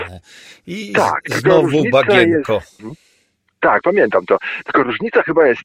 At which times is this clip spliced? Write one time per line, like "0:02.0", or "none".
0:02.8